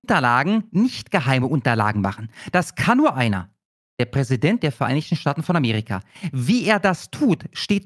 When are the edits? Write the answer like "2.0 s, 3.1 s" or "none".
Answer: none